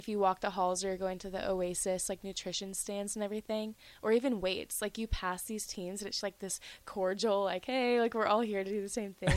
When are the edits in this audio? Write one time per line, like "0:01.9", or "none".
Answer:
0:06.2